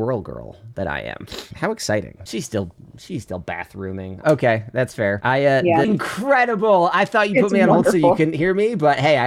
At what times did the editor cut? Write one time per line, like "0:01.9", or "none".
0:02.3
0:04.2
0:05.8